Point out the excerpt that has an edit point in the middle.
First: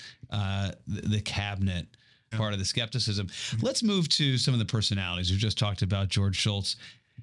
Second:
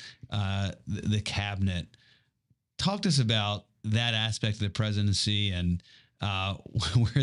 first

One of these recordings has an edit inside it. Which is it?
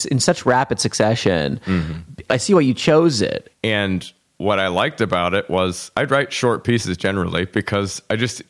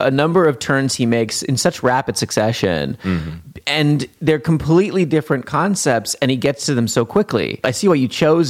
first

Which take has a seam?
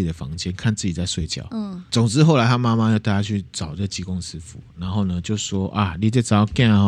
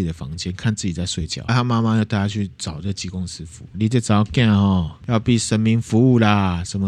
second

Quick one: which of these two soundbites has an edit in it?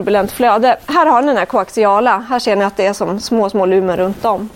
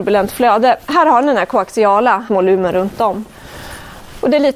second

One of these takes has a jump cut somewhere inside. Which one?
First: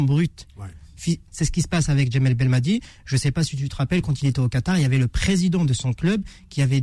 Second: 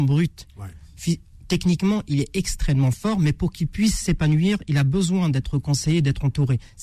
first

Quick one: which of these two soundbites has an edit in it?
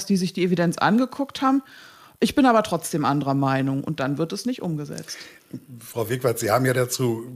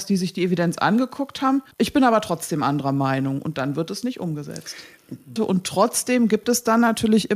second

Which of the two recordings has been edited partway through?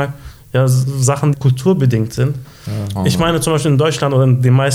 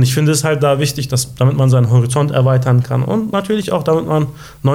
first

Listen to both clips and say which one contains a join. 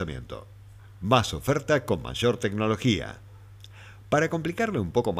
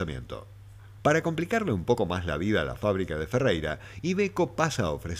second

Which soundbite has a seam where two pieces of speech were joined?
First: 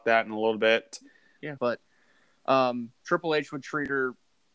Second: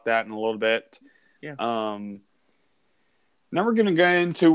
first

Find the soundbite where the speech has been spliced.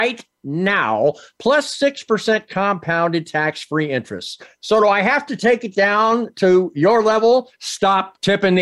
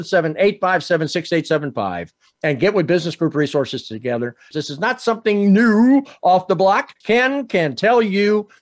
second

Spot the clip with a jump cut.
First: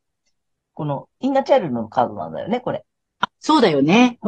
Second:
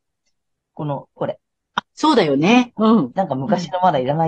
second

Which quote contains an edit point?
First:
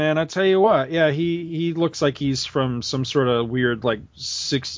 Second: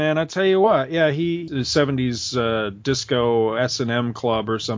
second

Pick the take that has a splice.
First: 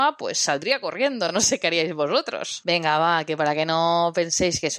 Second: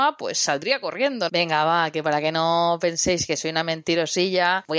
second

